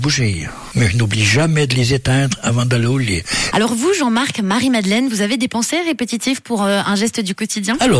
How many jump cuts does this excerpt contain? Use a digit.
1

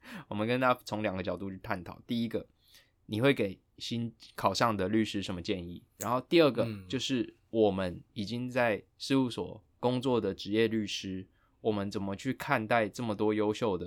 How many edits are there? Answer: 2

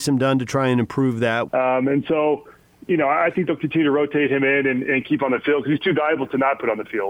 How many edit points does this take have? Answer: 1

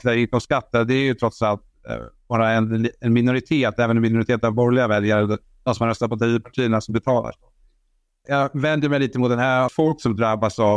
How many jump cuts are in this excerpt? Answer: 2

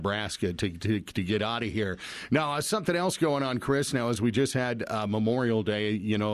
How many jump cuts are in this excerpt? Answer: 0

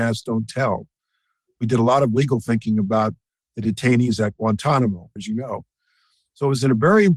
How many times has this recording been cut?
1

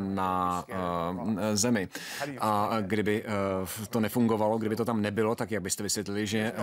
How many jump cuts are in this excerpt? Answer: 0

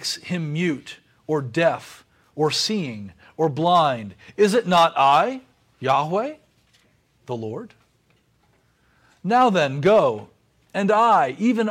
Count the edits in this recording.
0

